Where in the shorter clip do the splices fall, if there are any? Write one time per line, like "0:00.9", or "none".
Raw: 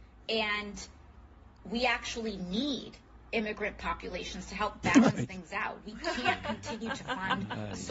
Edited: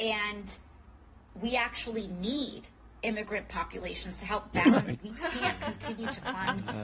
0:05.0